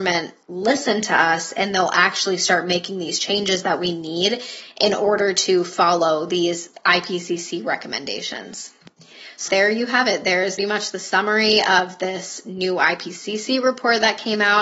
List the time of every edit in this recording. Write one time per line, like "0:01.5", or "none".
0:09.5
0:10.6